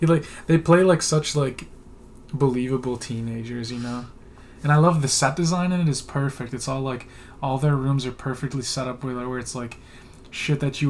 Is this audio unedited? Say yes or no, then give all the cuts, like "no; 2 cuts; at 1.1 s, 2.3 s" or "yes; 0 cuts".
yes; 0 cuts